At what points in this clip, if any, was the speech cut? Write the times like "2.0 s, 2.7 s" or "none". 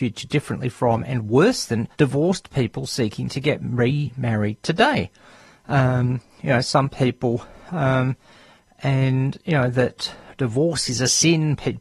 1.9 s